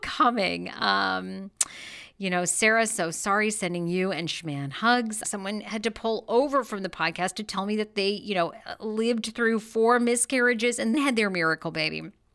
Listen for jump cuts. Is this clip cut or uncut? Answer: cut